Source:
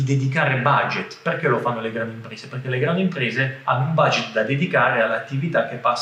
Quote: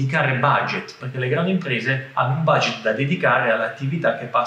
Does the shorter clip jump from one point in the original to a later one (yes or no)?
yes